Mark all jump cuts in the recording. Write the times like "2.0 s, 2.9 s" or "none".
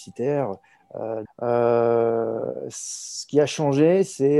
1.3 s